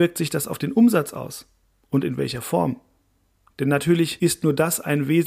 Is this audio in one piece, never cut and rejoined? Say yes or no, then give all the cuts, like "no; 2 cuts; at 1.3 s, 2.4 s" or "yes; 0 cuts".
yes; 0 cuts